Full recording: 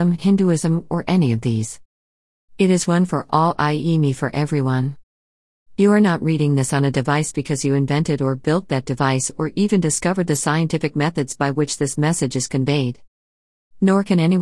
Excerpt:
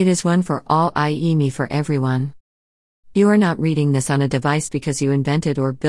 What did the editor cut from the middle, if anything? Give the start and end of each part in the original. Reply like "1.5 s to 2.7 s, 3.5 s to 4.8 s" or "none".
none